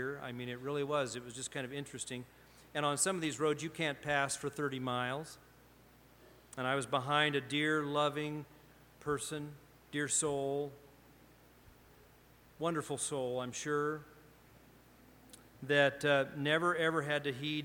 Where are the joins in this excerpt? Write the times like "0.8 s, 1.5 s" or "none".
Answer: none